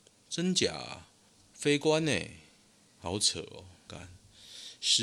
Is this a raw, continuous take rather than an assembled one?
no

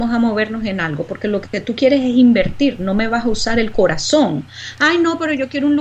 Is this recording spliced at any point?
no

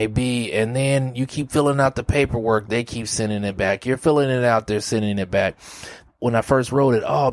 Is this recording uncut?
no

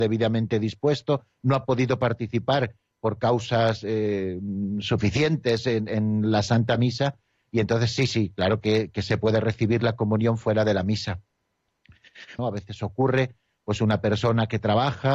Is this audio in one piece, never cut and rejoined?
no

